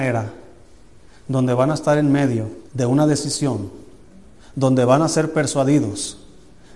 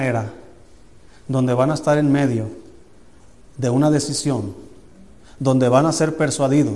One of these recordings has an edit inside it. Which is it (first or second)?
first